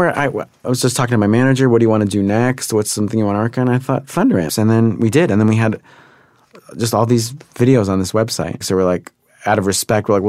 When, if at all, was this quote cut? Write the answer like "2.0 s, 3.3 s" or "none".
4.5 s, 8.6 s

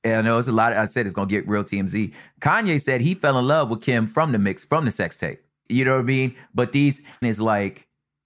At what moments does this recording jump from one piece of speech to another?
5.7 s, 7.2 s

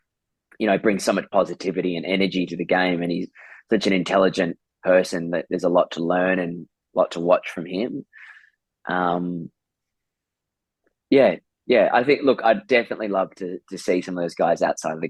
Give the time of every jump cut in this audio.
none

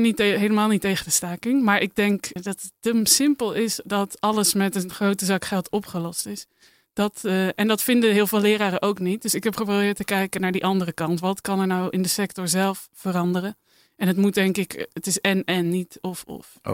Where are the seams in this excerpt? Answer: 2.4 s

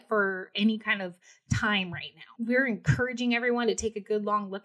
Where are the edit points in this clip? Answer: 2.4 s

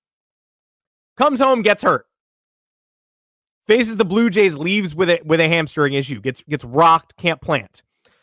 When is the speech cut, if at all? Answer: none

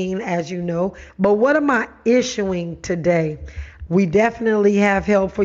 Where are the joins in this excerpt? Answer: 1.1 s, 3.9 s

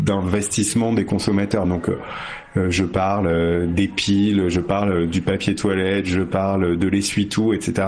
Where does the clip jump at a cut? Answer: none

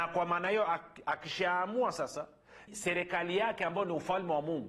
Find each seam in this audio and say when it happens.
2.7 s

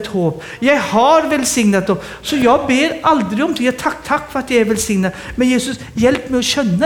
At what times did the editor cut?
none

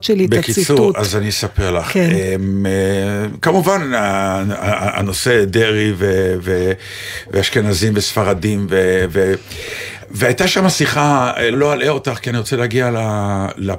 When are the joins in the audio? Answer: 11.5 s

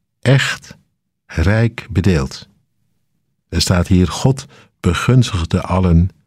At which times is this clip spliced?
none

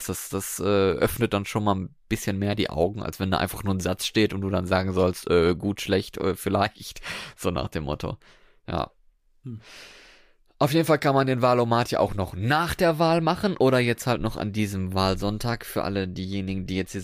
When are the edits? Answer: none

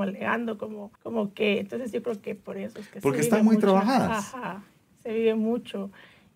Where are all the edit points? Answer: 1.0 s

